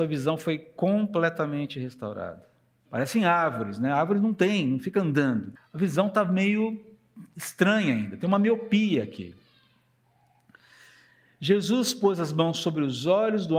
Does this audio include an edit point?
yes; 2 cuts; at 2.9 s, 5.6 s

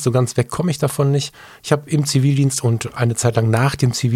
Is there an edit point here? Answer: no; 0 cuts

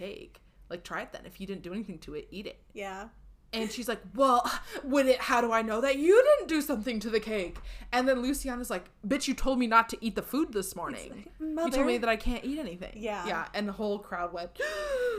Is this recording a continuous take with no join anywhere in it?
yes; 0 cuts

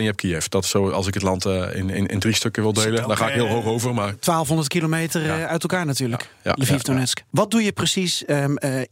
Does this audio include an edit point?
no; 0 cuts

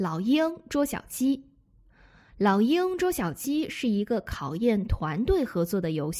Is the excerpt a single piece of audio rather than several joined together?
yes; 0 cuts

